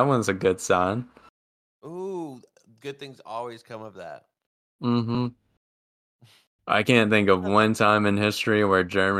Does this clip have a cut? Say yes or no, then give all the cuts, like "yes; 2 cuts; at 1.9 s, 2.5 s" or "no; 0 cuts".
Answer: no; 0 cuts